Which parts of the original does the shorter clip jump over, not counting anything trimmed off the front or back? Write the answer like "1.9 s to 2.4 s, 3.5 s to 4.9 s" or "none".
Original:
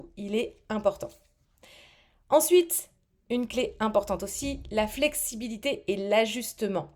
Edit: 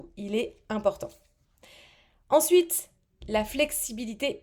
3.2 s to 4.6 s